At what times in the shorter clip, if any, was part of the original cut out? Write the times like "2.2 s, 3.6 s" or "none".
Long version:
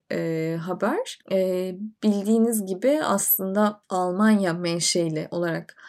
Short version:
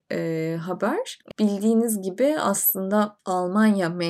1.3 s